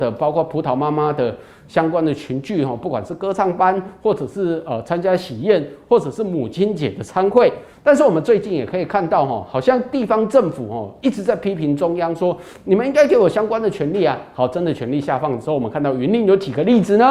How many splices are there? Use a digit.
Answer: 1